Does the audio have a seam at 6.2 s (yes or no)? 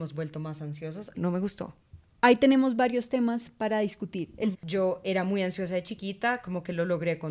no